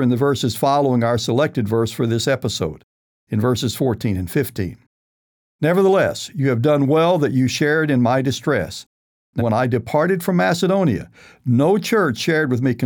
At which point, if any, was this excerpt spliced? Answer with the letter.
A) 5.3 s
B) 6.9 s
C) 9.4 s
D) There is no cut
C